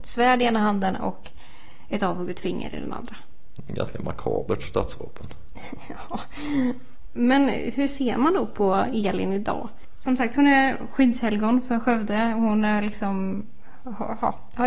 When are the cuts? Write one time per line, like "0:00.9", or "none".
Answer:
none

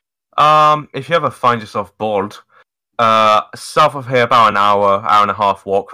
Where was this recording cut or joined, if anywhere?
none

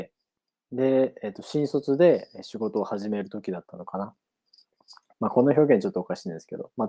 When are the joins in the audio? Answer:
0:05.1

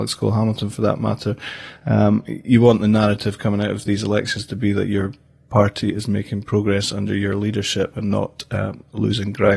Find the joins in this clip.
none

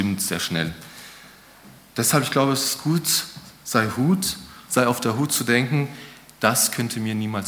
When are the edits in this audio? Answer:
none

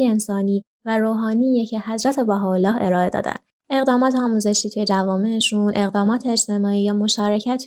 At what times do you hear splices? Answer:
0:03.6

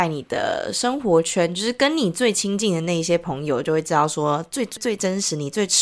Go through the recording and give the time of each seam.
0:04.8

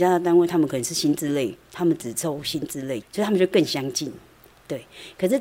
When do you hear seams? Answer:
0:03.0

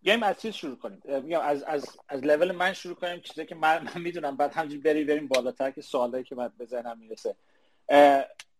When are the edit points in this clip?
0:01.0

